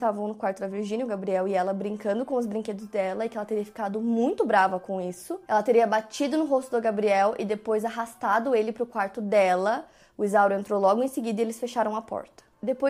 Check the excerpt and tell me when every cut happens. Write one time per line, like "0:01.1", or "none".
none